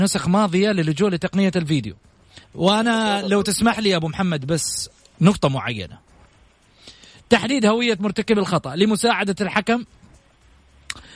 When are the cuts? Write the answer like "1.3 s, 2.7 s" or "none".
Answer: 2.4 s, 7.1 s